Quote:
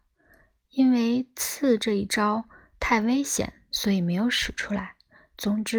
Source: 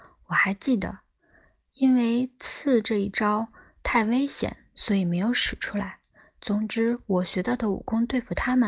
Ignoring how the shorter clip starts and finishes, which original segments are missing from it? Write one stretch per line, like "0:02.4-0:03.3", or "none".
none